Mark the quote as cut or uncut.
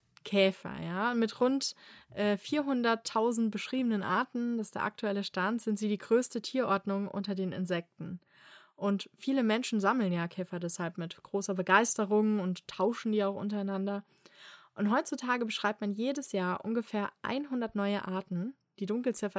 uncut